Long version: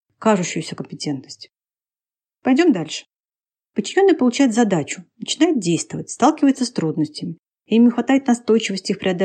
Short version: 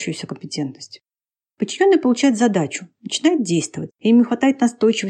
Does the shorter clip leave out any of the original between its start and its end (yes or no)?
yes